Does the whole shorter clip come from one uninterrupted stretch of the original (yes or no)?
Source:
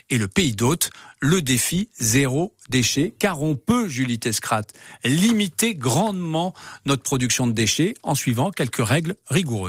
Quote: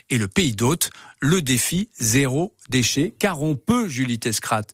yes